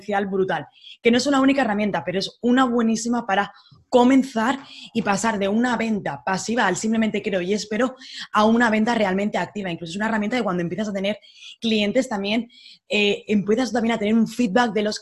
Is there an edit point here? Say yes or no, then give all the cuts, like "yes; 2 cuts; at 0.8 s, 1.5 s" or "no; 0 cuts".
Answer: no; 0 cuts